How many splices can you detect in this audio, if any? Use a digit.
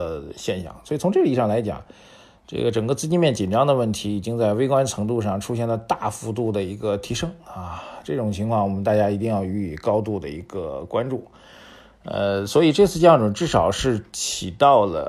0